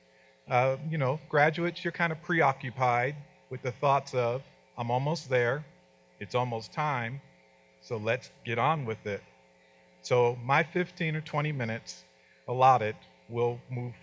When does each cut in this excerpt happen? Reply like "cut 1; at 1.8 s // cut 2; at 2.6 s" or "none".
none